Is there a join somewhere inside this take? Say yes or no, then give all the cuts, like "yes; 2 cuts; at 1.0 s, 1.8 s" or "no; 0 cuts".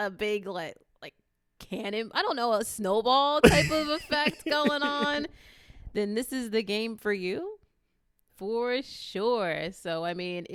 yes; 1 cut; at 8.3 s